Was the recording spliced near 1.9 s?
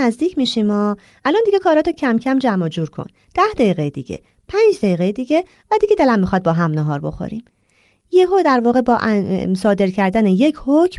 no; 0 cuts

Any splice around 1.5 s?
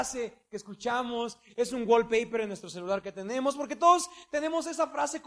yes; 1 cut; at 1.5 s

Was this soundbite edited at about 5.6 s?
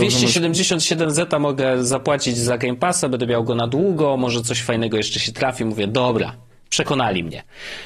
no; 0 cuts

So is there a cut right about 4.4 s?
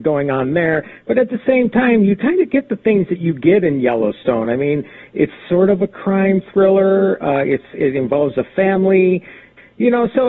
no; 0 cuts

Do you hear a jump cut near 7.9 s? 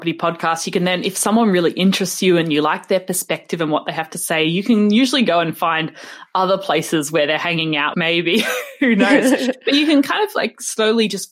yes; 1 cut; at 7.9 s

